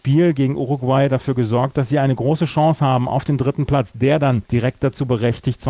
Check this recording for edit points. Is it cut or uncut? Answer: cut